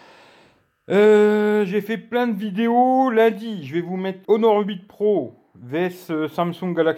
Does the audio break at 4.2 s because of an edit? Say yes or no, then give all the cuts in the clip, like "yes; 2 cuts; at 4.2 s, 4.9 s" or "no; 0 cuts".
yes; 1 cut; at 4.2 s